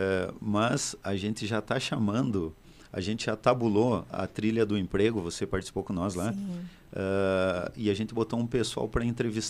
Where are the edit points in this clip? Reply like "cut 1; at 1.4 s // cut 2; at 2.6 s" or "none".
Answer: none

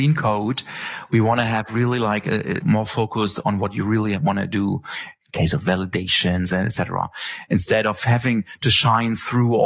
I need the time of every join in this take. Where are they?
cut 1; at 2.6 s

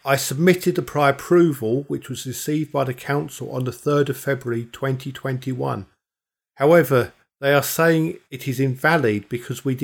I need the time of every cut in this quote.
none

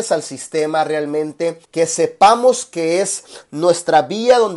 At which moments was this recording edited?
cut 1; at 1.6 s

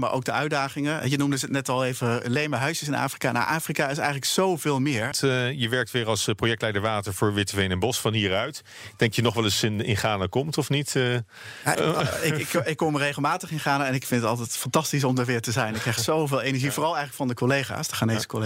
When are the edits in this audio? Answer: cut 1; at 5.1 s // cut 2; at 11.7 s

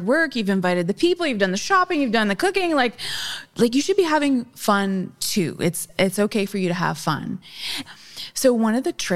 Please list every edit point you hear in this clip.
cut 1; at 7.8 s

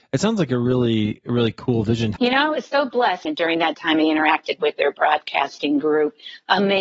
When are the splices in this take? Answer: cut 1; at 2.2 s // cut 2; at 3.2 s

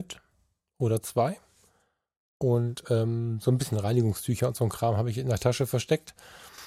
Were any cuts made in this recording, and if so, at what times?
none

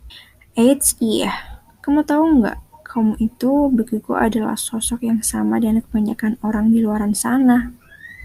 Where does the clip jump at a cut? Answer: none

